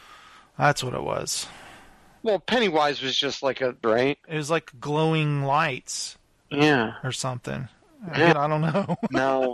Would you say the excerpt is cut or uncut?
cut